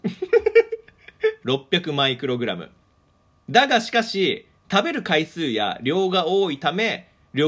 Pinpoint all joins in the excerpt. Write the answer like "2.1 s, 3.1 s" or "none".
1.4 s